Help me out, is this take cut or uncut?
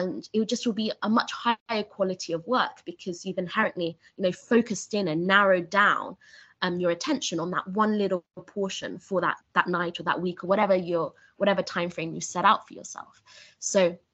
cut